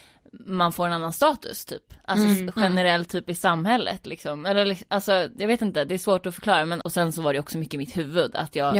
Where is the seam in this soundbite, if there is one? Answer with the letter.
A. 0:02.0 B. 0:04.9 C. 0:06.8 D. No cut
C